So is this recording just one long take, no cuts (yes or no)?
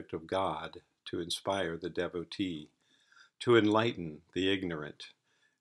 yes